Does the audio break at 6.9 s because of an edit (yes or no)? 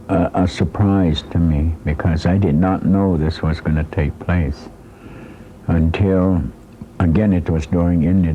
no